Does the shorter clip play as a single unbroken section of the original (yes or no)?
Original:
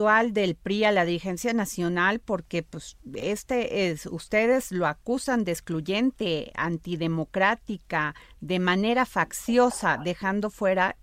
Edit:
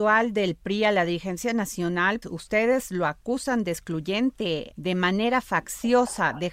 no